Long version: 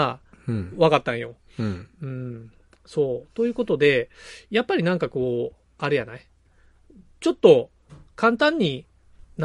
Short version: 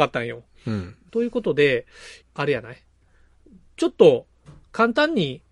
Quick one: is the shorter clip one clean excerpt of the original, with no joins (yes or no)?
no